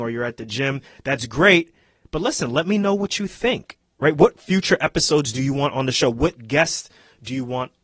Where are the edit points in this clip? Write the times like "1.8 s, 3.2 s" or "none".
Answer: none